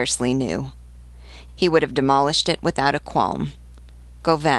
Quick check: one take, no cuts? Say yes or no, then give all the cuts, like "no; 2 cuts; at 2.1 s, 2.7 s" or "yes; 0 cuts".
no; 1 cut; at 1.5 s